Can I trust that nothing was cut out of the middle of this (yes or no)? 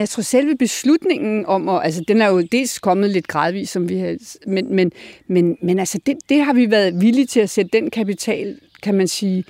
yes